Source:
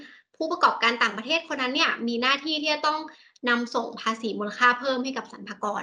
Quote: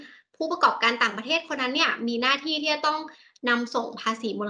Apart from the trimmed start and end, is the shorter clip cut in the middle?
no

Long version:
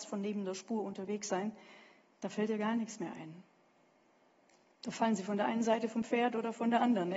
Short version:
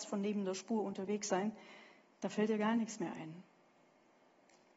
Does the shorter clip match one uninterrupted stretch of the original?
yes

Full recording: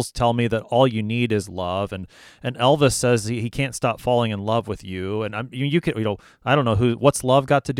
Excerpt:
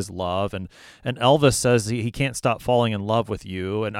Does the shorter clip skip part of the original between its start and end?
no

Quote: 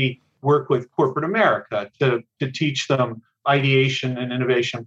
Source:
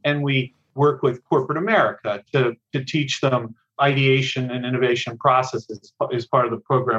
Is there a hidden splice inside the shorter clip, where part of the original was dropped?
no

